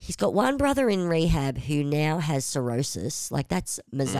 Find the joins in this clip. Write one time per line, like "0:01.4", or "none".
none